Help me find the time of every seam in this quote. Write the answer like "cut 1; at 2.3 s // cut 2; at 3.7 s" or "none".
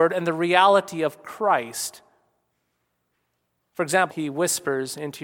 cut 1; at 4.1 s